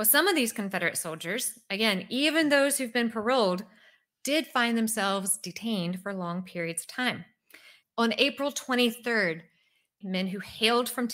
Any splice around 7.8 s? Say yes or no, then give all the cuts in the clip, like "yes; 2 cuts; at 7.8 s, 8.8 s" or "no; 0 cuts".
yes; 2 cuts; at 7.8 s, 10.0 s